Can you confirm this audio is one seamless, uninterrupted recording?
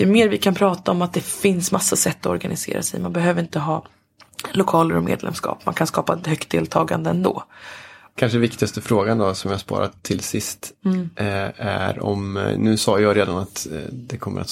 no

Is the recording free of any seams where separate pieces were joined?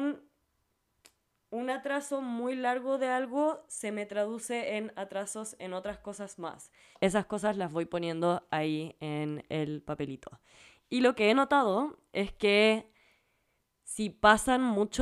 no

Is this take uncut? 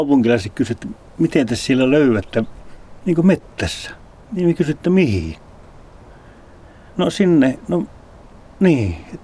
yes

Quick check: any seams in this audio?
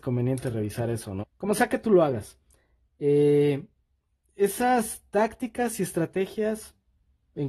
yes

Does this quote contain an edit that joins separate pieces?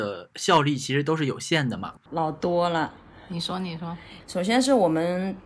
yes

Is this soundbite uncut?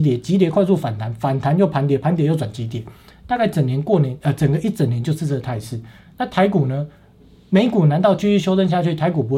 yes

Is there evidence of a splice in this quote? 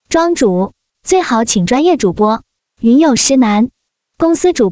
yes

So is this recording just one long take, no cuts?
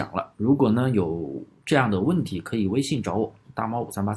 yes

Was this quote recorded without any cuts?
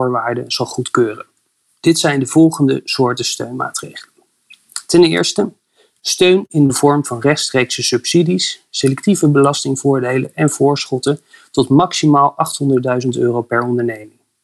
yes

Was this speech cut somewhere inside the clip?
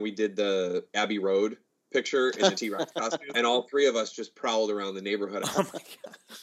yes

